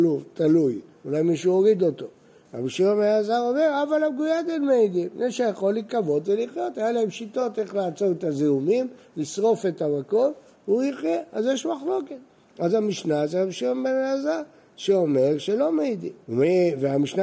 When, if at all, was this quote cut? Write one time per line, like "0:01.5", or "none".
0:16.2